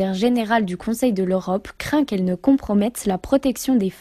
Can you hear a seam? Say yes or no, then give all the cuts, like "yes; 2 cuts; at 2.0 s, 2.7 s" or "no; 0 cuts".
no; 0 cuts